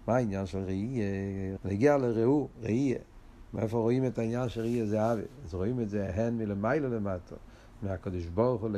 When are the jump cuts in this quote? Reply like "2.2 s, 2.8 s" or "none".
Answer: 1.6 s